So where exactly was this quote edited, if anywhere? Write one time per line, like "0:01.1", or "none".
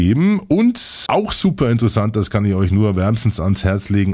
0:01.1